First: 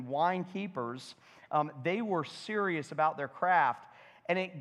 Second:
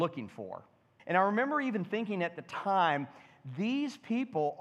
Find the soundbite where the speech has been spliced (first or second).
second